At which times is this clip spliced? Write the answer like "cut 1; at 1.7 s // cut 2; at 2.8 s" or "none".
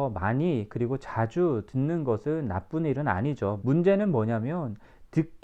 cut 1; at 3.6 s